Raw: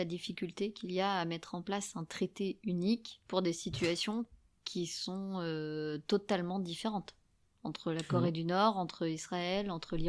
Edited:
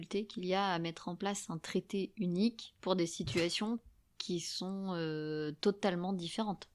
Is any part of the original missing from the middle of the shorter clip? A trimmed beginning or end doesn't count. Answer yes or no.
no